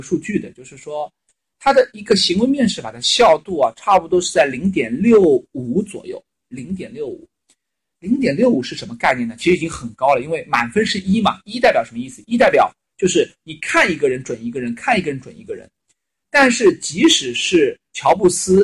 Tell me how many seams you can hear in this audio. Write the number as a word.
zero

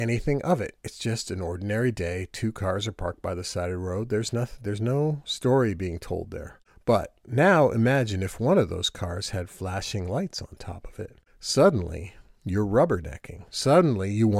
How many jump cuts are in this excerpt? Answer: one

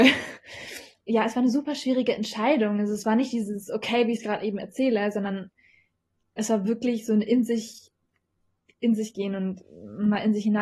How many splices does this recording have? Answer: zero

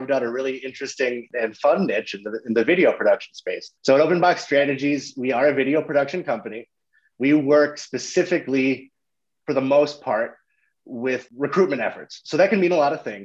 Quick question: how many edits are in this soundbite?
one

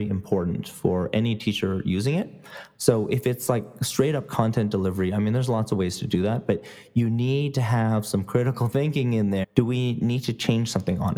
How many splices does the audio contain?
two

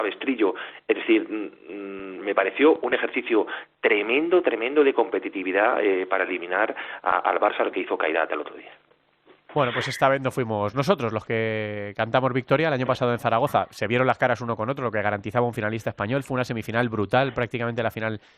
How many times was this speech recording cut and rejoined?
zero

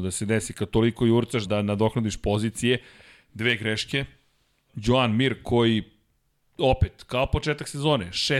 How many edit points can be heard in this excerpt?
two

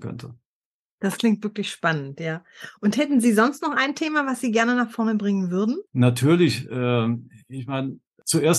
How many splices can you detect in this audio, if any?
one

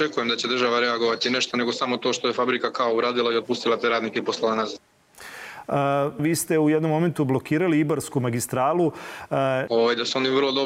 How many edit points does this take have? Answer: two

